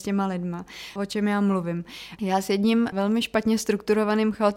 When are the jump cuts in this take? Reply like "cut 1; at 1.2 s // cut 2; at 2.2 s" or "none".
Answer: cut 1; at 1.0 s // cut 2; at 2.2 s

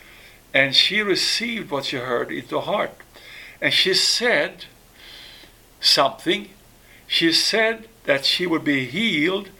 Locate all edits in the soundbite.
none

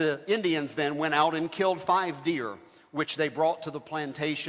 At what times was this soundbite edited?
none

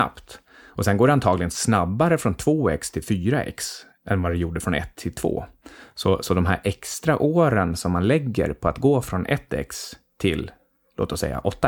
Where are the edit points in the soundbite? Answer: none

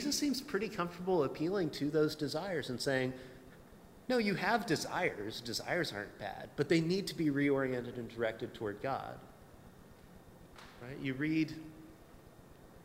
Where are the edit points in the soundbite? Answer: none

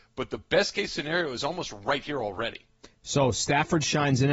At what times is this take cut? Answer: none

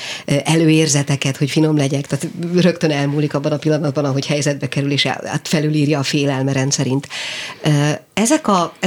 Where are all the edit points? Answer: cut 1; at 2.1 s

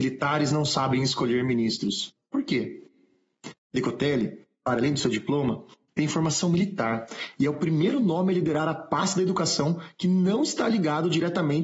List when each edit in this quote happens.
cut 1; at 2.2 s

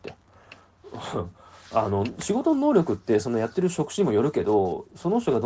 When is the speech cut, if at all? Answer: none

